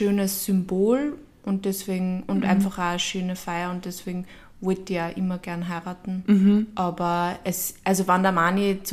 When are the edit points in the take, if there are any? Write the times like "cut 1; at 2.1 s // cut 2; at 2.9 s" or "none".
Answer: none